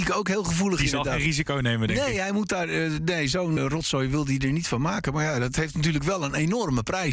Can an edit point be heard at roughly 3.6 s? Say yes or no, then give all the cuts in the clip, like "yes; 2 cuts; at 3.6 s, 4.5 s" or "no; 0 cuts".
yes; 1 cut; at 3.6 s